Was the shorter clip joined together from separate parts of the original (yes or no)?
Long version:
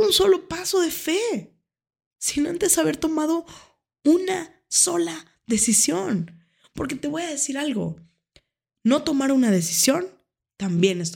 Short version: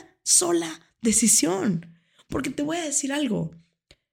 no